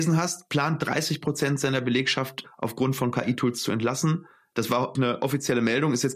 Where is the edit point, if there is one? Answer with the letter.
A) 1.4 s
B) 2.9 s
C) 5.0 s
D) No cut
C